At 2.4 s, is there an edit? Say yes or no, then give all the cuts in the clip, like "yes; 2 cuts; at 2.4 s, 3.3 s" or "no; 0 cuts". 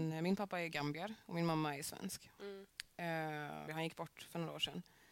no; 1 cut; at 3.7 s